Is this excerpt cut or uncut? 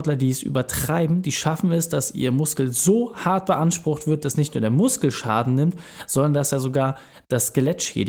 uncut